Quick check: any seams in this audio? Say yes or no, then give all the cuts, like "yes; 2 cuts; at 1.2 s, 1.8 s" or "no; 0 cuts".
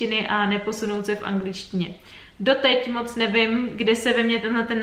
no; 0 cuts